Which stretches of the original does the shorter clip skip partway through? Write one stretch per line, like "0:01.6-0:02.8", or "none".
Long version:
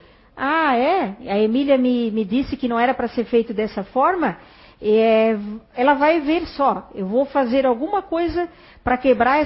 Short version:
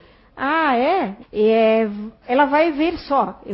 0:01.2-0:04.7